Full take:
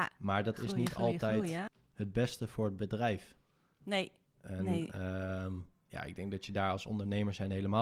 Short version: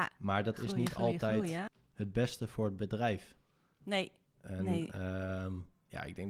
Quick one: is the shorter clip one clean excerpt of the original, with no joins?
yes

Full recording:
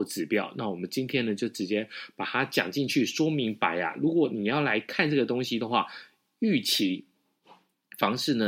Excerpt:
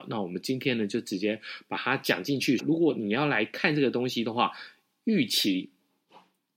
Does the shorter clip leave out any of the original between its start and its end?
yes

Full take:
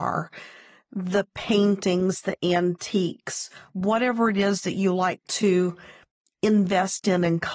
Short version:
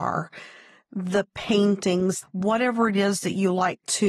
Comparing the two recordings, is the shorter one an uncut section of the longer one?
no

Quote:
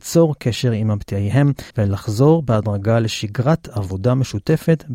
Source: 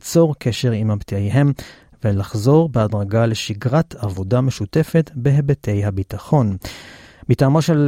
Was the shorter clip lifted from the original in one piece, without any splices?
no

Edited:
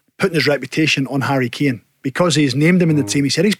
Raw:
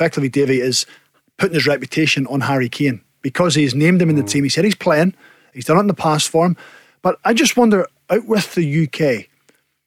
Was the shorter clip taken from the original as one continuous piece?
yes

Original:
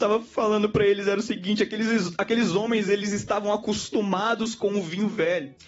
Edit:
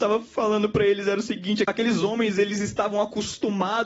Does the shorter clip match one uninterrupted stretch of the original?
no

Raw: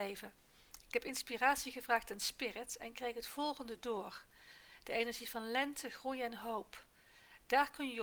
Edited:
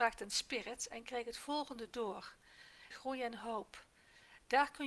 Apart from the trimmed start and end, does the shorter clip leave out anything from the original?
yes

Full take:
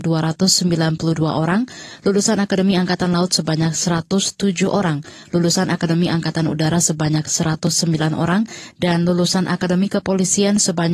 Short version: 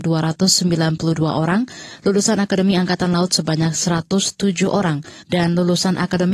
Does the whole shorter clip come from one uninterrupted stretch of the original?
no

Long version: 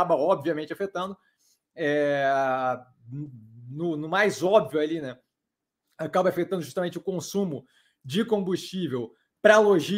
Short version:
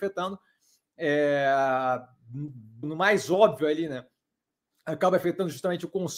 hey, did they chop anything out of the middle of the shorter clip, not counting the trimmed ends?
yes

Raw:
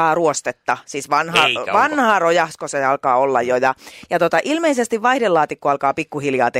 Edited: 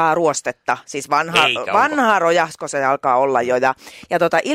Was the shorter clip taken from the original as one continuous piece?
yes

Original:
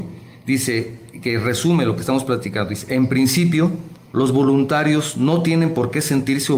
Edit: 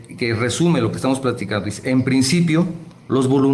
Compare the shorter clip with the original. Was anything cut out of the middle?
no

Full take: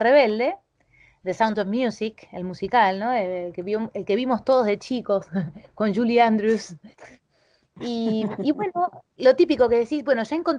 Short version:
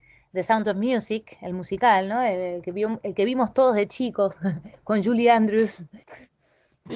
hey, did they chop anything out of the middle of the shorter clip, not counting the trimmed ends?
no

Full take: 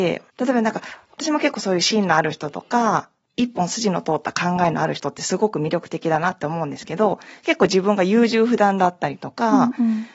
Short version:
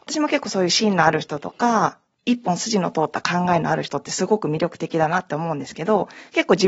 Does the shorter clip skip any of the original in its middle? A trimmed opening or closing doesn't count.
no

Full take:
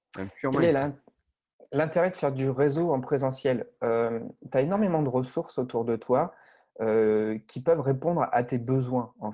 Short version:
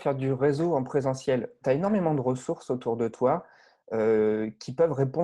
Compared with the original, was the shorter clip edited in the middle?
yes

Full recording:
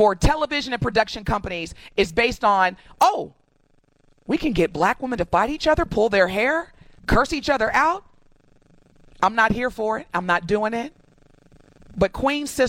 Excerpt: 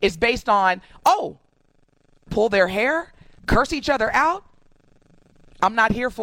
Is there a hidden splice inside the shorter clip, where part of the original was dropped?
yes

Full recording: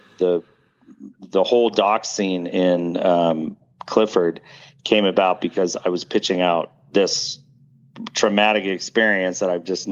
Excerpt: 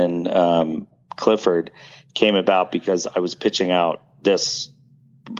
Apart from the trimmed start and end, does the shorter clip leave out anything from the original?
no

